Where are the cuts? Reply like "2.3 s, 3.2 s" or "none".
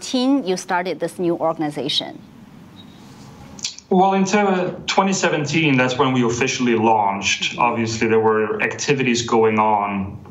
none